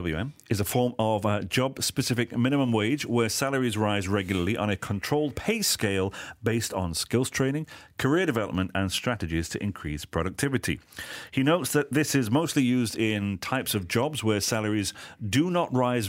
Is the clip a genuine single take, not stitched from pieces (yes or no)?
yes